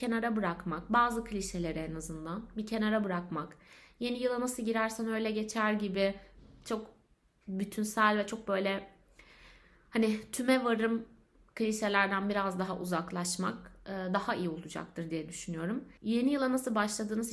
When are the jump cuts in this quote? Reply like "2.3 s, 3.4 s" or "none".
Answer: 16.0 s